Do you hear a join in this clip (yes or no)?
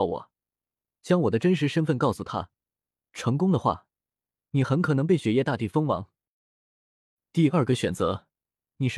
no